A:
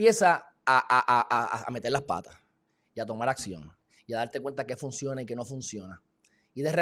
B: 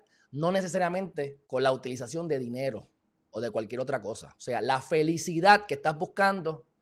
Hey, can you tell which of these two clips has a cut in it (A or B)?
B